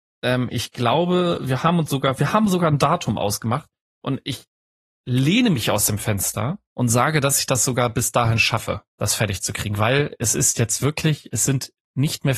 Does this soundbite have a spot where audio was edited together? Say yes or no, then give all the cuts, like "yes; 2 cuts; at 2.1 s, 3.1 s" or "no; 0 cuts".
yes; 2 cuts; at 6.6 s, 8.9 s